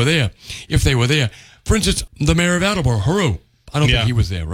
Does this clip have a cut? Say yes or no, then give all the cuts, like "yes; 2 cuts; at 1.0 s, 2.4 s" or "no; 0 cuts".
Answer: yes; 1 cut; at 2.1 s